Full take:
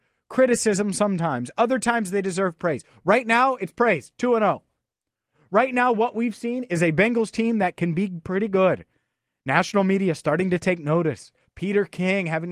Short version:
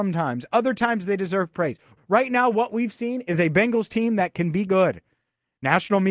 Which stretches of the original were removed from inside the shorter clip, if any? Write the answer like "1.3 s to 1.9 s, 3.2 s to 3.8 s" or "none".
3.0 s to 5.4 s, 8.1 s to 8.5 s